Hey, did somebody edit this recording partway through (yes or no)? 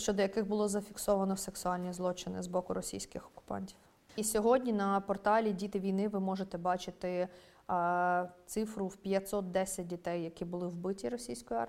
yes